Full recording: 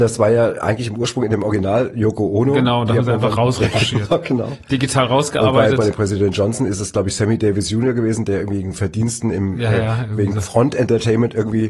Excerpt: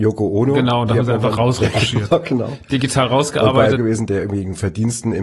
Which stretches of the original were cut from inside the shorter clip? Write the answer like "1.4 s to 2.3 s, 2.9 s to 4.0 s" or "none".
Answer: 5.7 s to 7.9 s